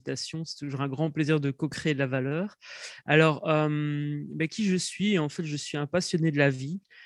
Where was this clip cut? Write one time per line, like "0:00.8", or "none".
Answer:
none